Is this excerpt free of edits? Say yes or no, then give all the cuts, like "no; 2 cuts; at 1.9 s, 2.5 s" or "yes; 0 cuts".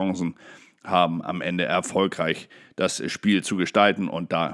yes; 0 cuts